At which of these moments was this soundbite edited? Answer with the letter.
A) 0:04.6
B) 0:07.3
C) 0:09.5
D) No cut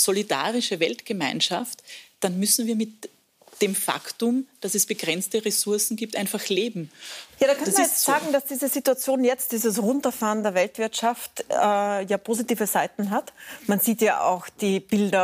D